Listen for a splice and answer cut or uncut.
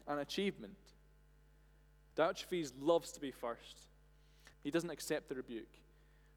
cut